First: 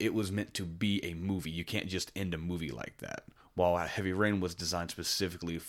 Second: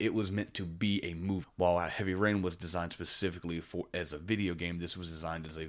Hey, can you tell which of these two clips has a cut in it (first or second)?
second